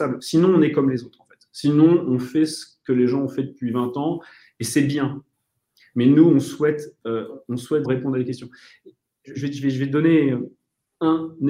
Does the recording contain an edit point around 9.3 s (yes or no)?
yes